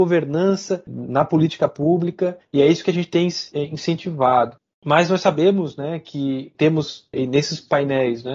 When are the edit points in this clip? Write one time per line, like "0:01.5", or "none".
none